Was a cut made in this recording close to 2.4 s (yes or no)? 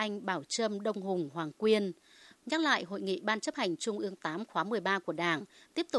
yes